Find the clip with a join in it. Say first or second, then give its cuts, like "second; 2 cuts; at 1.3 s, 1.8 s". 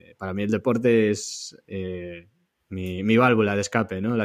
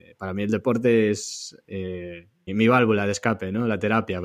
second; 1 cut; at 2.5 s